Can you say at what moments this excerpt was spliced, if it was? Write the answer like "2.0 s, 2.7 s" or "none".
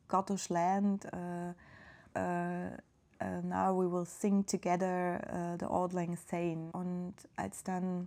2.1 s, 6.7 s